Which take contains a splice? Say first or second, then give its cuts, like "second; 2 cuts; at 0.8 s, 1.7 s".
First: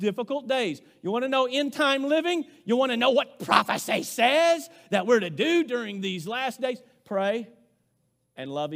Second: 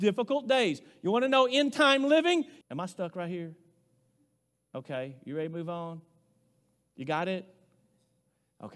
second; 1 cut; at 2.6 s